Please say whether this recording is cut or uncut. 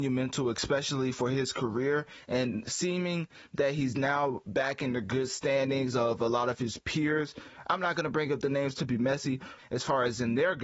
cut